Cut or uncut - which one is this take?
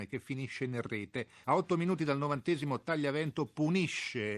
cut